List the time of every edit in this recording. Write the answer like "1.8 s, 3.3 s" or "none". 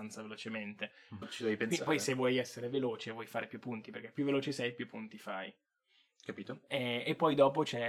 1.2 s